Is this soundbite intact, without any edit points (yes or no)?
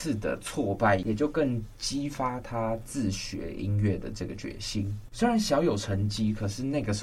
no